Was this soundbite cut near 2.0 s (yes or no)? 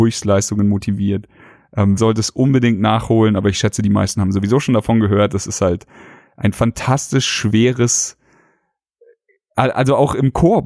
yes